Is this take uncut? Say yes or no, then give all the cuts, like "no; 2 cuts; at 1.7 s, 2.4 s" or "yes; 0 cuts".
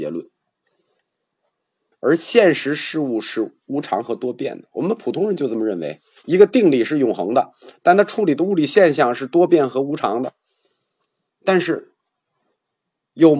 no; 2 cuts; at 1.9 s, 11.3 s